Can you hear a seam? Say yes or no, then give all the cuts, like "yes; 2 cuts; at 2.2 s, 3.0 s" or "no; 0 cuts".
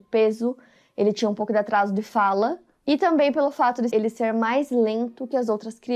yes; 1 cut; at 3.9 s